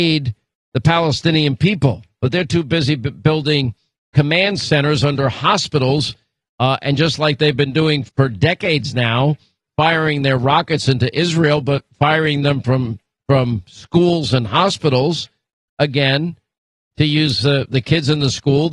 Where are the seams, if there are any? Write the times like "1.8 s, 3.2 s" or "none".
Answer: 8.1 s, 17.7 s

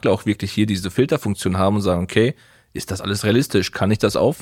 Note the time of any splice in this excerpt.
none

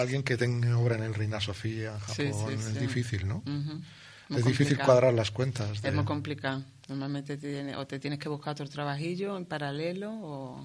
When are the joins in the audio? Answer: none

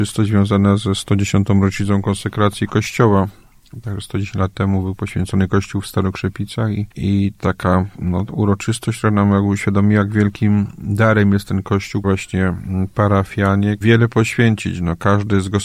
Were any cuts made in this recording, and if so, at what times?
6.9 s, 12.0 s, 13.8 s

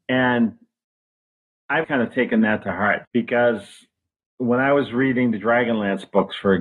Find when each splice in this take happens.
1.8 s, 3.0 s

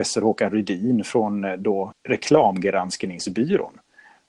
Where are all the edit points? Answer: 1.9 s

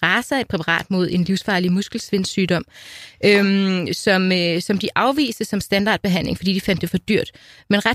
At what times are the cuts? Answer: none

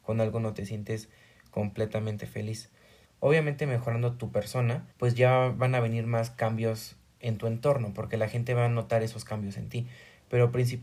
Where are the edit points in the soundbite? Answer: 3.1 s, 4.9 s

